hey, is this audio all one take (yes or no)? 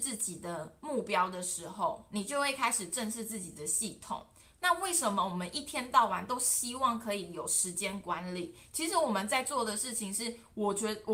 yes